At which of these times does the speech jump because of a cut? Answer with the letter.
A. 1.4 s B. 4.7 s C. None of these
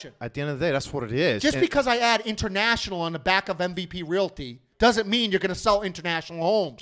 B